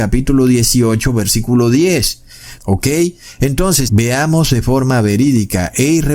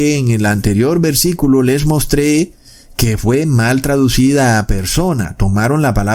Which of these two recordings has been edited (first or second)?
first